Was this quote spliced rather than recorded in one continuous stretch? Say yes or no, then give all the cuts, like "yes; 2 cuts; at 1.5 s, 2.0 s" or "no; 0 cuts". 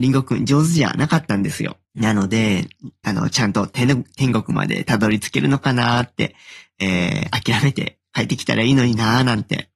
yes; 2 cuts; at 1.8 s, 3.0 s